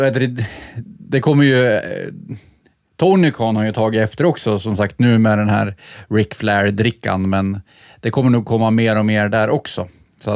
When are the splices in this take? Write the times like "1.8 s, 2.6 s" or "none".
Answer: none